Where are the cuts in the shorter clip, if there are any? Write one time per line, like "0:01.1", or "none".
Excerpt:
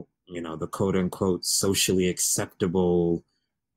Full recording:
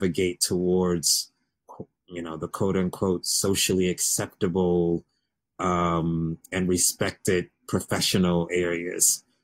none